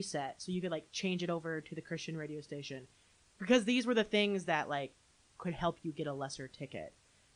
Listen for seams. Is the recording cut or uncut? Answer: uncut